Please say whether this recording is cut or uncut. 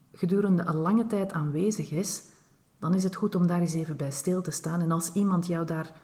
uncut